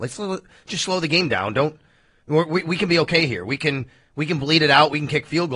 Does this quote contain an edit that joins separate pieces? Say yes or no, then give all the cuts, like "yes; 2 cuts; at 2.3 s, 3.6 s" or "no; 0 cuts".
no; 0 cuts